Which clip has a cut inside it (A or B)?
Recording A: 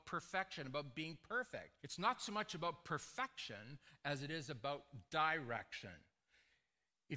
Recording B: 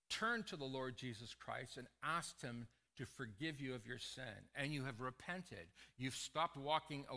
A